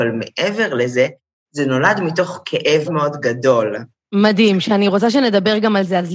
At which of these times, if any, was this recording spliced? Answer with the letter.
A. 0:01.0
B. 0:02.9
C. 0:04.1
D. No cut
B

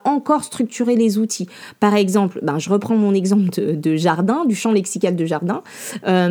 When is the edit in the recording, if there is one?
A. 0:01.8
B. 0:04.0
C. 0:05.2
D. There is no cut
D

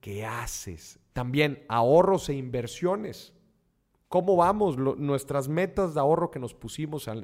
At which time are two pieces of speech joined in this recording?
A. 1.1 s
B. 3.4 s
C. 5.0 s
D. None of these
A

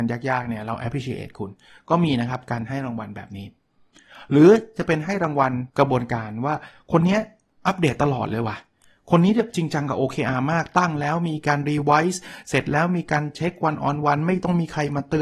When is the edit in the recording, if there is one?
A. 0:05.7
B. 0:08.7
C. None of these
A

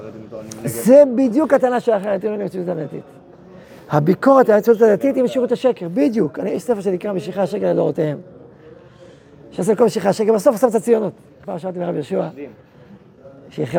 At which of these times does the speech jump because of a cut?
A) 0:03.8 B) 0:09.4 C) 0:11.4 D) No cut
C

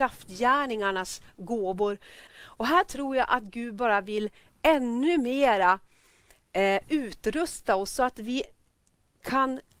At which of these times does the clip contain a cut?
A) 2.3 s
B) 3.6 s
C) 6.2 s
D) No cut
A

